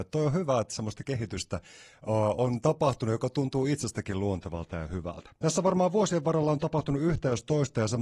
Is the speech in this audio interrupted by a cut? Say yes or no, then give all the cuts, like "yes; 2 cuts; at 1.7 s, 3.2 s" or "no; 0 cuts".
no; 0 cuts